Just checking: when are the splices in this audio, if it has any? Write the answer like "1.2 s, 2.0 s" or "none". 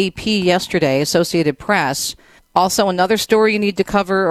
2.4 s